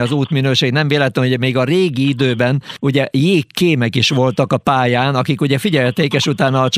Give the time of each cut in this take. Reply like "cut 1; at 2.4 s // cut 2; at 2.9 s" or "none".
none

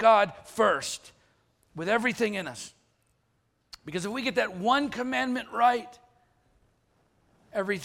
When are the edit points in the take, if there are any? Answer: none

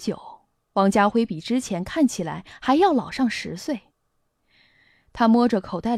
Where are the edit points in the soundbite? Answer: none

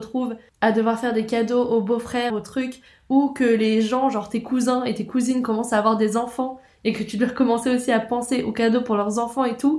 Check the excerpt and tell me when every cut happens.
cut 1; at 2.3 s

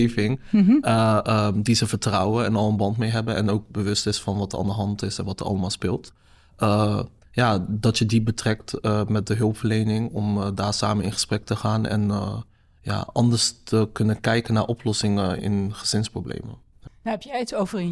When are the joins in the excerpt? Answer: cut 1; at 15.4 s // cut 2; at 16.9 s

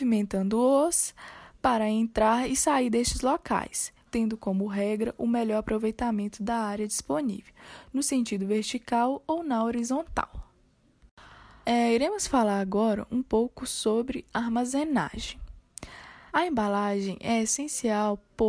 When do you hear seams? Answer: cut 1; at 4.1 s // cut 2; at 11.6 s // cut 3; at 16.3 s

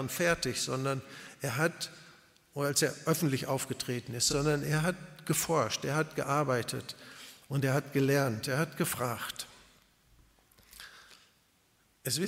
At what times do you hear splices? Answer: none

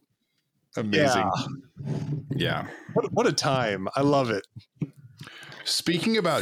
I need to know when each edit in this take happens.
none

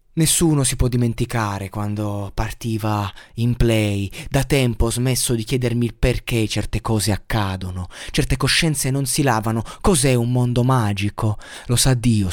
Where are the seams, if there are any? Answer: none

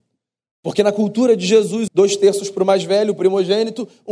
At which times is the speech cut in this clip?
cut 1; at 1.9 s

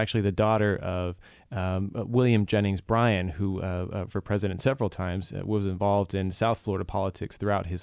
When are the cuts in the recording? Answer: cut 1; at 4.1 s

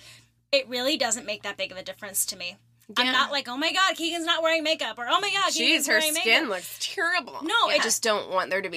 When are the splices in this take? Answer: cut 1; at 7.8 s

